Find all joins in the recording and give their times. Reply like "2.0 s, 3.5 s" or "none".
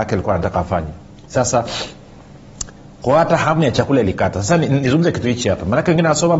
1.2 s